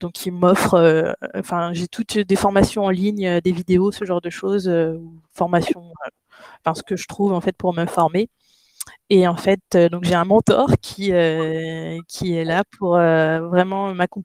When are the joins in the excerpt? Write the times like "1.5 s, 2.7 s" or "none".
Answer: none

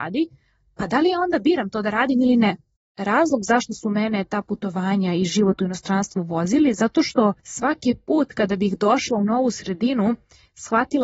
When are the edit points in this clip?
2.8 s, 7.4 s

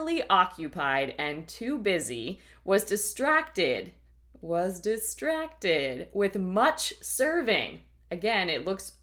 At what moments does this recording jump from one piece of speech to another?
none

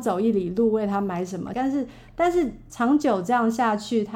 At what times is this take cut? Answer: 1.5 s, 2.7 s

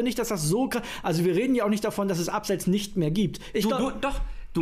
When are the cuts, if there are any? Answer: 3.5 s

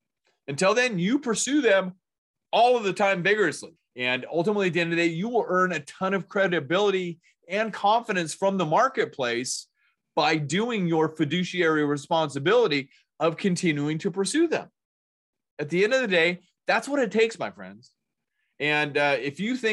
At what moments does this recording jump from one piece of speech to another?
3.8 s

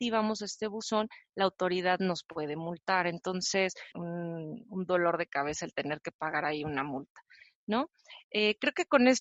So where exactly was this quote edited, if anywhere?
3.9 s

